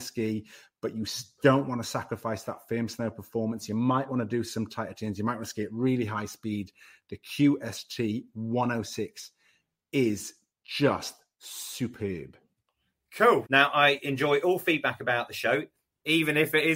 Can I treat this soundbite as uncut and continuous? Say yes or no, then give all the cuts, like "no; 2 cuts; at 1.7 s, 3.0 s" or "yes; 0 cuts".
no; 1 cut; at 13.5 s